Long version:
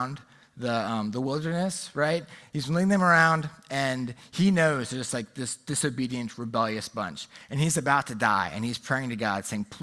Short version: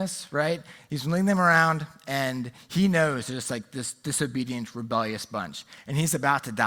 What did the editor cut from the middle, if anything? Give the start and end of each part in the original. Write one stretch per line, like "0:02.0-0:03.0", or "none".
none